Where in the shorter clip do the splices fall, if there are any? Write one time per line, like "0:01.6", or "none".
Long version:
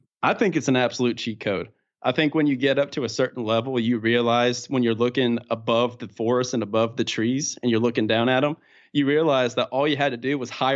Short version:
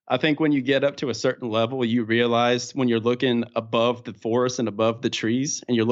none